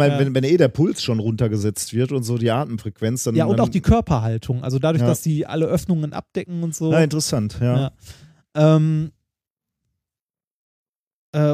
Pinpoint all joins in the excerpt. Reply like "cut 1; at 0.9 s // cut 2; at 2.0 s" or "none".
none